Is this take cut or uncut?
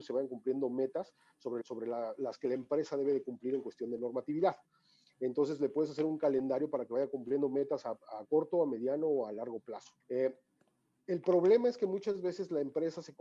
cut